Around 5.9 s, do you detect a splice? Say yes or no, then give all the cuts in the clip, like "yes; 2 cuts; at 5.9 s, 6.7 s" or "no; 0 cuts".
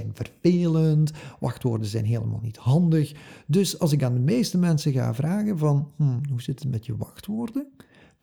no; 0 cuts